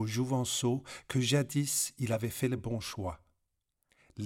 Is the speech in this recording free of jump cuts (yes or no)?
yes